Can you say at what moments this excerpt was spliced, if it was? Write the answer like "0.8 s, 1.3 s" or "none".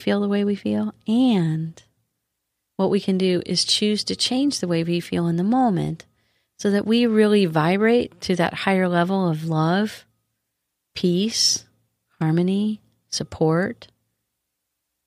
none